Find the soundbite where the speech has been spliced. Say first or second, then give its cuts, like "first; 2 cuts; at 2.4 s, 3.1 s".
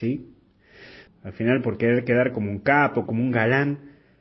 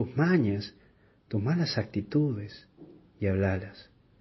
first; 2 cuts; at 1.1 s, 3.1 s